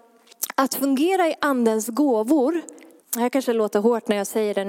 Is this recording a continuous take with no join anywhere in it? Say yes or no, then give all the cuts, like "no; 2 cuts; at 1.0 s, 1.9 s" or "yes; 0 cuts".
no; 1 cut; at 3.0 s